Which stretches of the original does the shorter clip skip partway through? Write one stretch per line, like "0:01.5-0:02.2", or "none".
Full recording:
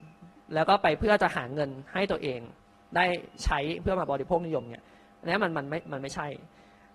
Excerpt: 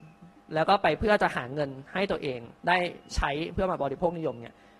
0:02.6-0:02.9